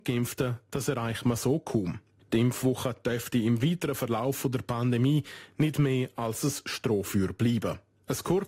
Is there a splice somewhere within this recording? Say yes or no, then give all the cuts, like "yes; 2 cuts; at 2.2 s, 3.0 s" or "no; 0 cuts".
yes; 1 cut; at 2.2 s